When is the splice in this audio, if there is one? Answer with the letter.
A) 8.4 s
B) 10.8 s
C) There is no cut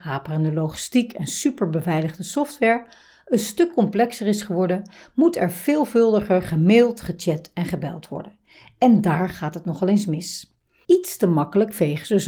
B